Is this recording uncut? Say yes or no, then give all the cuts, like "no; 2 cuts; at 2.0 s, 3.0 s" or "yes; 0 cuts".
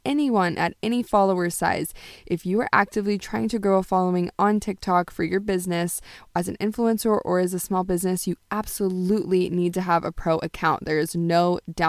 yes; 0 cuts